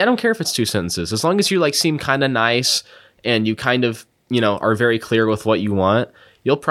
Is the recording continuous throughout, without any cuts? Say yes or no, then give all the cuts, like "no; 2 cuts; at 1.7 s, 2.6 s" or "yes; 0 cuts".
yes; 0 cuts